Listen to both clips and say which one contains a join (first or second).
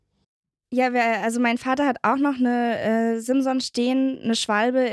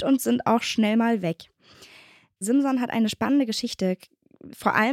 second